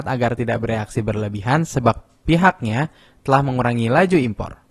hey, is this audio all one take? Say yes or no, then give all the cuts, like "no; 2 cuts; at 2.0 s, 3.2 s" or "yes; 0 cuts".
yes; 0 cuts